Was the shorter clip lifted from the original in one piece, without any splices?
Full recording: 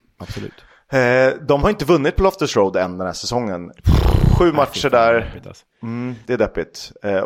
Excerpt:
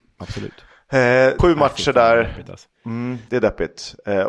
no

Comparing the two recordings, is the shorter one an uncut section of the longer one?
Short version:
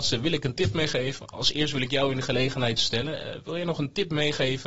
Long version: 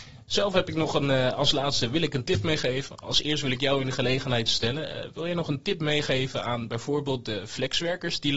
yes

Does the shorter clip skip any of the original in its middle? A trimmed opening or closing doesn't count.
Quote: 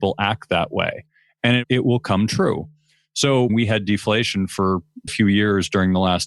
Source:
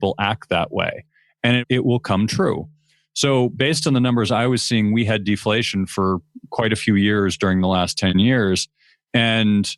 yes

